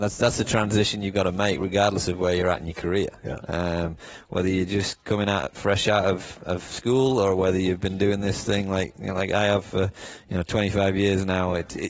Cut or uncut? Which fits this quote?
uncut